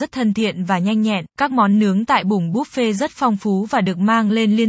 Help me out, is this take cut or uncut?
cut